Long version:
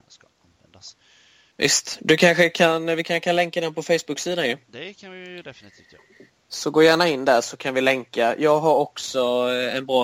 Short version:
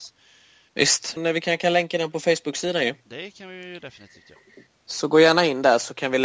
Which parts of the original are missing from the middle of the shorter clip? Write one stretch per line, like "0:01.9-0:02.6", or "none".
0:02.0-0:02.8